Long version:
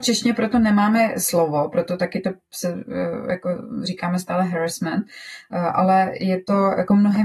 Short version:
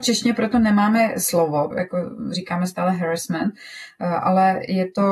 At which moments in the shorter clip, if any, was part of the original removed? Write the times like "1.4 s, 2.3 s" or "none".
1.7 s